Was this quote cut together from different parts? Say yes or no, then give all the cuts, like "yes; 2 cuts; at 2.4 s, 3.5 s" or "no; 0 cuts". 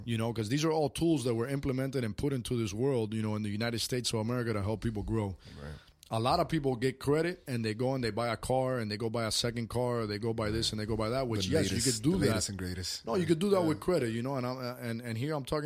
no; 0 cuts